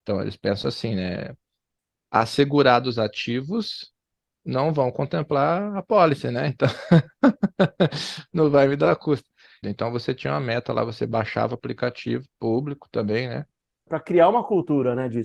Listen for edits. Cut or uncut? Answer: cut